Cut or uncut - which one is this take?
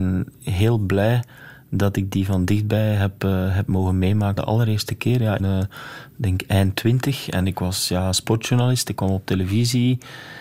cut